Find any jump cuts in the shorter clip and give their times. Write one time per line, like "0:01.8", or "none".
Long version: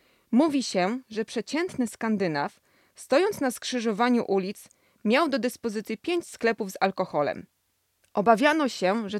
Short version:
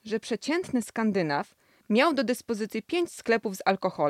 0:01.8